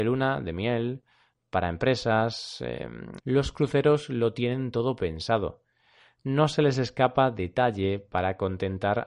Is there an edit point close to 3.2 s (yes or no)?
yes